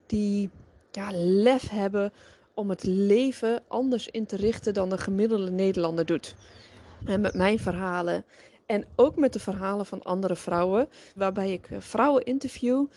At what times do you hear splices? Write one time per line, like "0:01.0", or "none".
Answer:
0:07.0
0:11.2